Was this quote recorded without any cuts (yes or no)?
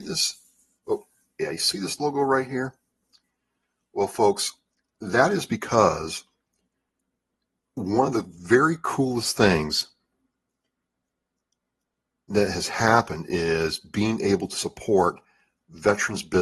yes